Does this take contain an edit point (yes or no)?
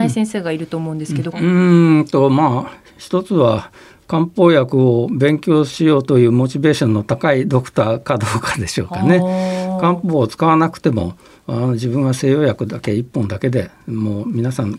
yes